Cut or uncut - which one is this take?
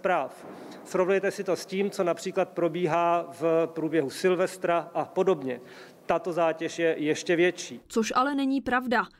uncut